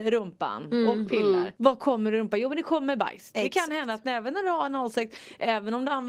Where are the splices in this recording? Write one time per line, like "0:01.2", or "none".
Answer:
0:01.6